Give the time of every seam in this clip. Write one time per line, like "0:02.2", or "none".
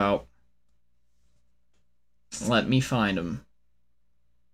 none